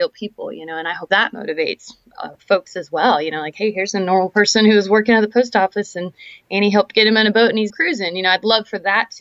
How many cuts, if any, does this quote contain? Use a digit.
1